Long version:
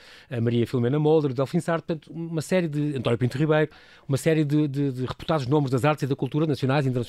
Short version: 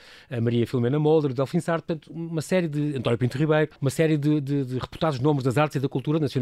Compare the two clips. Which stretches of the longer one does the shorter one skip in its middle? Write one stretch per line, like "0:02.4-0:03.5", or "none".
0:03.8-0:04.0

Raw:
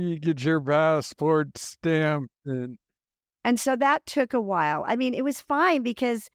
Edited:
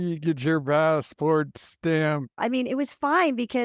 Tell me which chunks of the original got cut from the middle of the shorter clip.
0:02.4-0:04.9

